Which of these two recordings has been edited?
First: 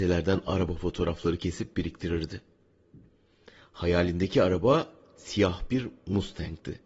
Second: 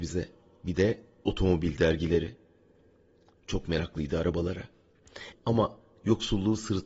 second; 1 cut; at 5.3 s

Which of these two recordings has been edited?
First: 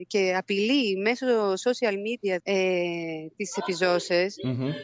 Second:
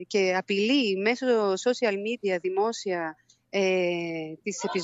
first; 1 cut; at 2.4 s

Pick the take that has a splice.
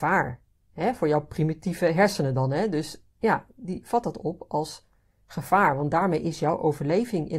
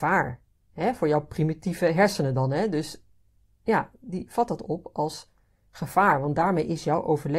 first; 1 cut; at 3.1 s

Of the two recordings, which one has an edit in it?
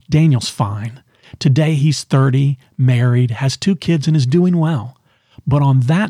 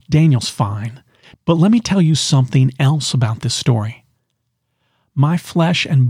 second; 1 cut; at 1.3 s

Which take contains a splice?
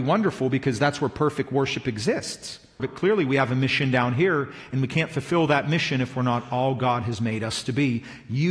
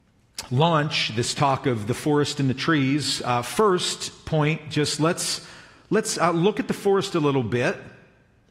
first; 1 cut; at 2.8 s

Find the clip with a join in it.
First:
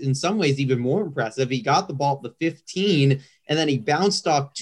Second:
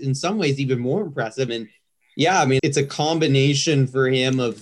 second; 2 cuts; at 1.5 s, 2.6 s

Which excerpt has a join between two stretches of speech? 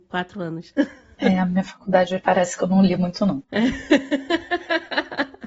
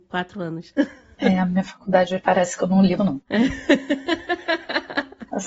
second; 1 cut; at 3.0 s

